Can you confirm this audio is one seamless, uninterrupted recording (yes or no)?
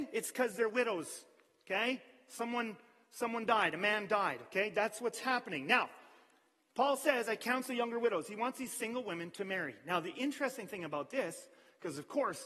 yes